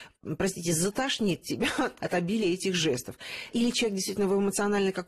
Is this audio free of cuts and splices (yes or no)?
yes